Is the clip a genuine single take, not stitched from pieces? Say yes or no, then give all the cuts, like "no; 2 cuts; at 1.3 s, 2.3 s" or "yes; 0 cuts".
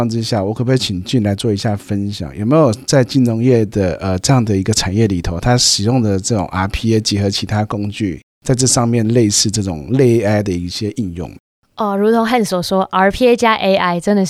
yes; 0 cuts